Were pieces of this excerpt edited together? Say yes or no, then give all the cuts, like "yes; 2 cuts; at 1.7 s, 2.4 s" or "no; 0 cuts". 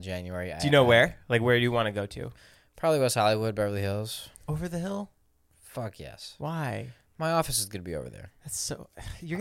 no; 0 cuts